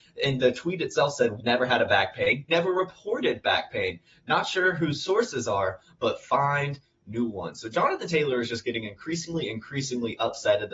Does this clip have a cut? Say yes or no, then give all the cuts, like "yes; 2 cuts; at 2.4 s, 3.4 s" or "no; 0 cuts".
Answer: yes; 2 cuts; at 1.4 s, 2.5 s